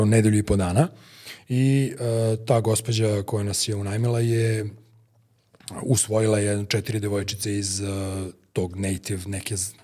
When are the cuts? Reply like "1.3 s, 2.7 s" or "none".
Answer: none